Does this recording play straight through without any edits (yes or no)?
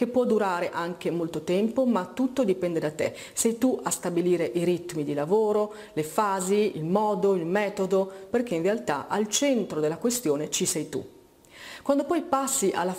no